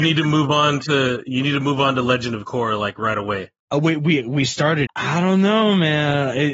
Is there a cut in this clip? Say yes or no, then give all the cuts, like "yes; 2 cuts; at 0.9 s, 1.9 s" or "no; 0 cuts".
yes; 2 cuts; at 3.6 s, 4.9 s